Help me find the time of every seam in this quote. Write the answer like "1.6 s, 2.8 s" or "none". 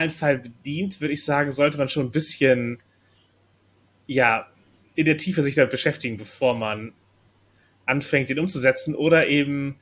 none